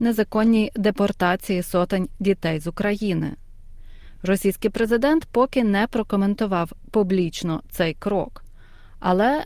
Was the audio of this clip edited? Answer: no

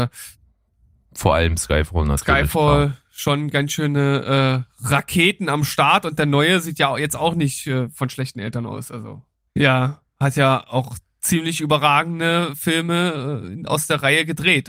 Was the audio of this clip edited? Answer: yes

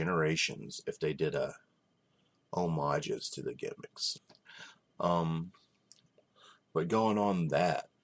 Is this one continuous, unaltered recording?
no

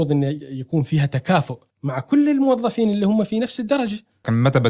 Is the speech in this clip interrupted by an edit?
yes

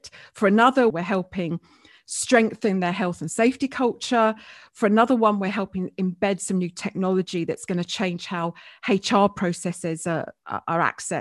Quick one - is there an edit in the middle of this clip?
yes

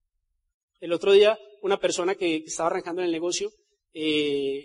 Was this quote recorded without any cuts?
yes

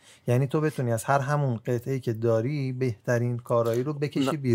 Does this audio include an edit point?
no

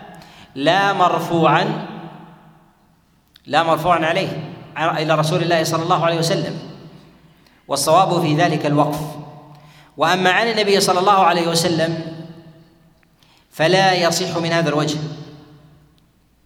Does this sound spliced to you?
no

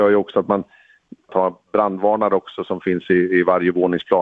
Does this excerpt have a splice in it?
yes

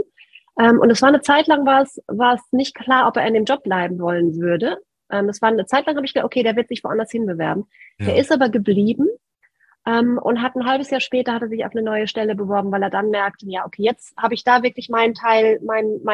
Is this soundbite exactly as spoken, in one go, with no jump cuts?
yes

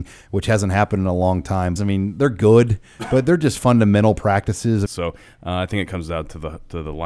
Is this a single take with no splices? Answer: no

